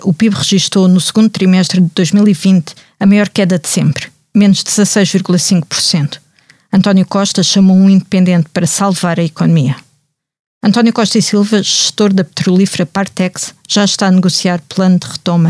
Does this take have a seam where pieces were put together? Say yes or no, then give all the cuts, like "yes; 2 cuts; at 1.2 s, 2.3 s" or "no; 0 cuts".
no; 0 cuts